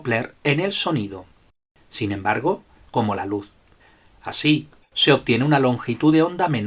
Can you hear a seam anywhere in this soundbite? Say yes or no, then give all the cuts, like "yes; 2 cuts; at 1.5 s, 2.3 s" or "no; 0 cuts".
yes; 2 cuts; at 2.9 s, 4.8 s